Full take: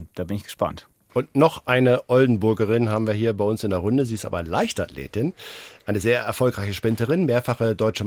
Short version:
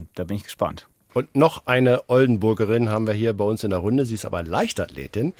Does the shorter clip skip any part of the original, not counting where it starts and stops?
no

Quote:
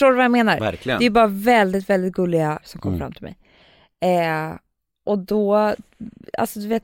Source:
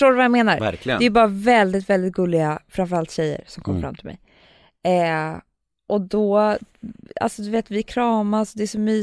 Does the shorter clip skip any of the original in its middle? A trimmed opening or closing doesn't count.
yes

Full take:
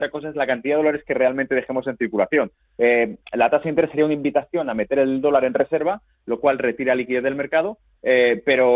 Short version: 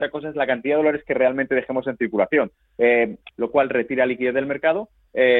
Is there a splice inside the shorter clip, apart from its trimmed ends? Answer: yes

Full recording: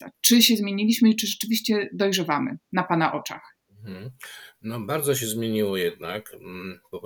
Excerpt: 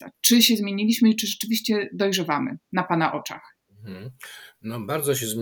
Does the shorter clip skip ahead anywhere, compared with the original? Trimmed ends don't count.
no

